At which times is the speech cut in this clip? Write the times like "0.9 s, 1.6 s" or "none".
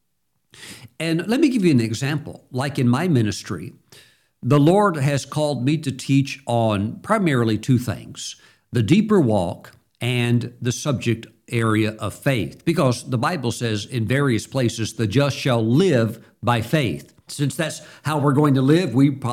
17.3 s